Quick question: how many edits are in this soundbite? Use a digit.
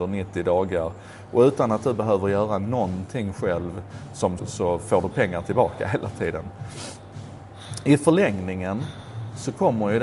1